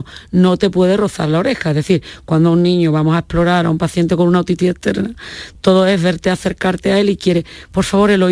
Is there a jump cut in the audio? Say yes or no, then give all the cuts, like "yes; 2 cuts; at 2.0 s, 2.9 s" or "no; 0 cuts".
no; 0 cuts